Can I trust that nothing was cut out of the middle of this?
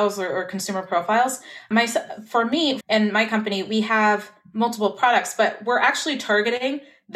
no; 1 cut; at 2.8 s

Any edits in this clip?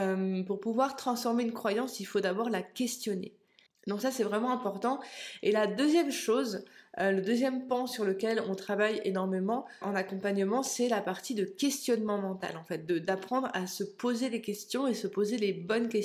yes; 2 cuts; at 3.7 s, 9.8 s

